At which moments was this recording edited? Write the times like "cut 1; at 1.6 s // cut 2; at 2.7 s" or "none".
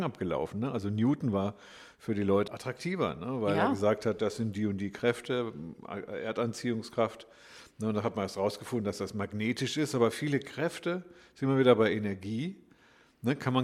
cut 1; at 2.5 s